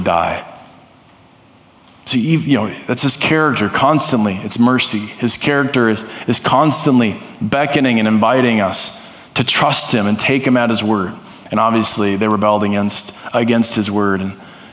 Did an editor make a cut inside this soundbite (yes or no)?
no